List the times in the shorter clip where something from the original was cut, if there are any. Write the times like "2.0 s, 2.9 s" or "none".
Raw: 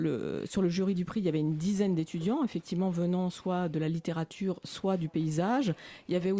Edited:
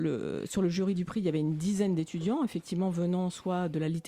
none